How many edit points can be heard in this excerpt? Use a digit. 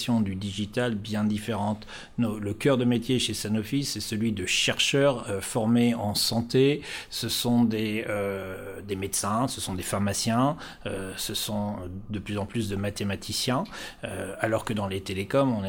0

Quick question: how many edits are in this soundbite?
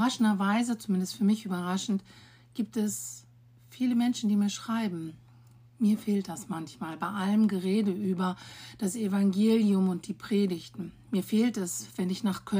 1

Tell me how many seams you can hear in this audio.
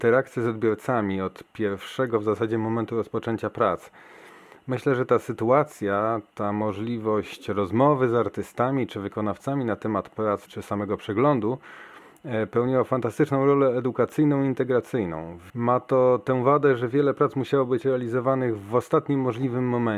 2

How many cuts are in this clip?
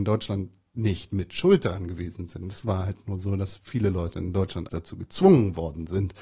1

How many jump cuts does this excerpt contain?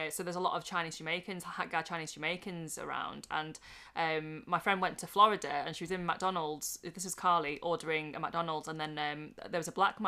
0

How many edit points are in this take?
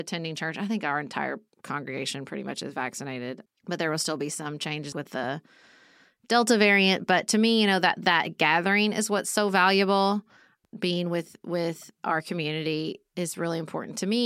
1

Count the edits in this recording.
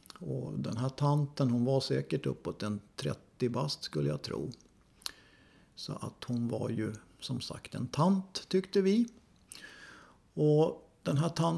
0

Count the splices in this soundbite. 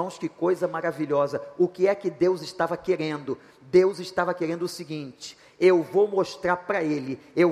0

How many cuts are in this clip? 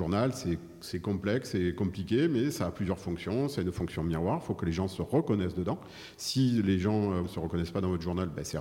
1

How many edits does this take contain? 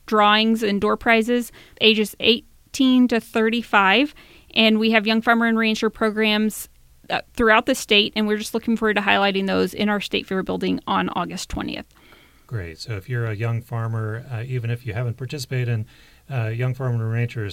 1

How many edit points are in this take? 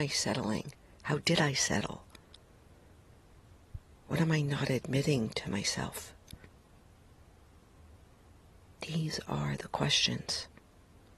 0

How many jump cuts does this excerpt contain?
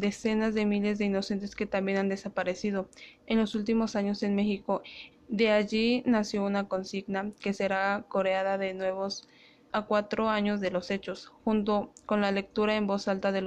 2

